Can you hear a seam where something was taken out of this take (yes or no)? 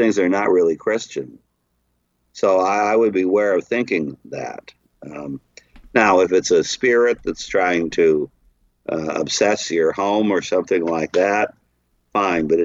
no